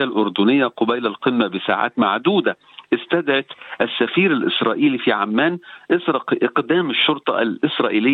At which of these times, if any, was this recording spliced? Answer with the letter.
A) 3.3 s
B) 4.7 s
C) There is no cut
C